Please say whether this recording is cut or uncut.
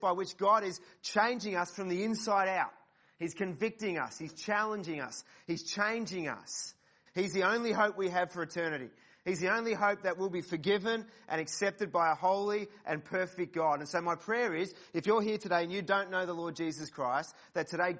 cut